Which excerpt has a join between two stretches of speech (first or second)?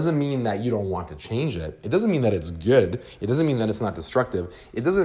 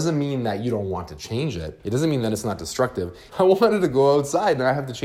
second